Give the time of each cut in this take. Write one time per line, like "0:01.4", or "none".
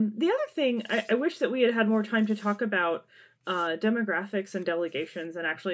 none